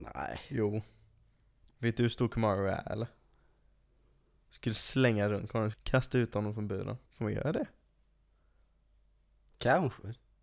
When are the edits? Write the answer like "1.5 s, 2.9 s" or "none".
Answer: 5.7 s, 7.1 s

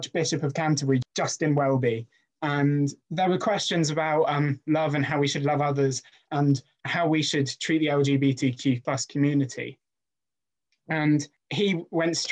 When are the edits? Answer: none

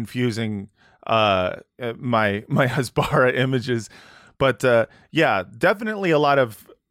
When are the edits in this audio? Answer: none

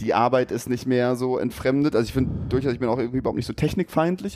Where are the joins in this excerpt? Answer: none

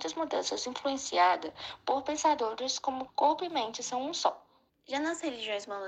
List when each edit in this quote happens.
3.1 s, 4.7 s

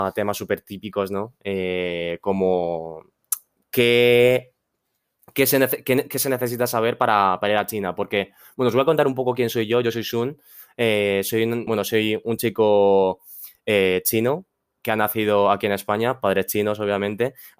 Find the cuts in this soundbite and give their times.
11.7 s

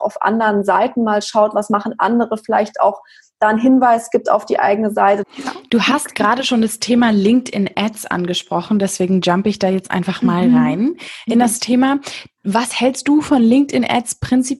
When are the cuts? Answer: 5.2 s

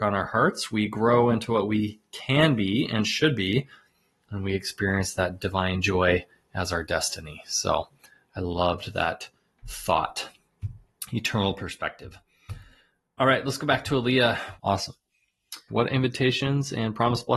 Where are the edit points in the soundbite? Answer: 14.6 s, 15.7 s

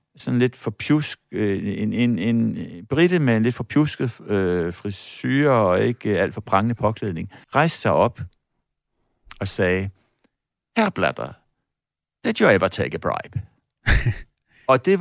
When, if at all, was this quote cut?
7.4 s

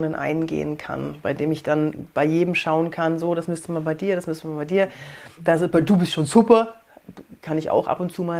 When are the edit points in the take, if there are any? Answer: none

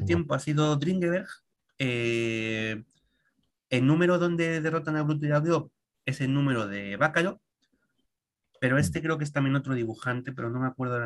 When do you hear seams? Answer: none

